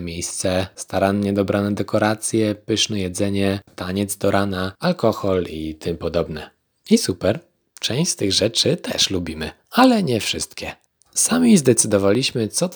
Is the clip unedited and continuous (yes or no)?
no